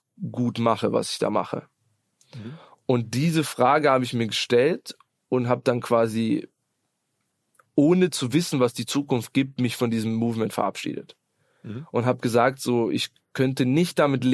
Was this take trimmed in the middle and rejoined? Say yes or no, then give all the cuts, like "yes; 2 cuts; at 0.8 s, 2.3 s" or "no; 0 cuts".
no; 0 cuts